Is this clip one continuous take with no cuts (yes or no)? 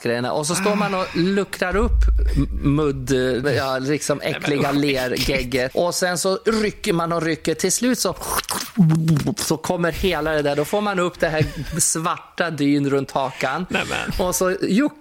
no